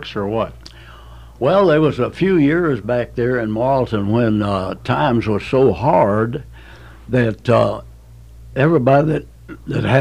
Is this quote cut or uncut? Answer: uncut